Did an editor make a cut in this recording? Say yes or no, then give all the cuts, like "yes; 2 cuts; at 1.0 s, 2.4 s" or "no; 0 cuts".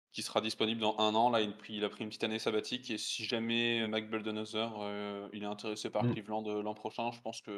yes; 1 cut; at 3.8 s